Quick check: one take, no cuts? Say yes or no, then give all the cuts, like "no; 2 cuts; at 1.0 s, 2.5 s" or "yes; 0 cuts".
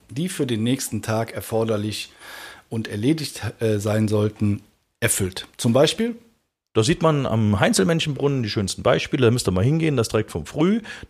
yes; 0 cuts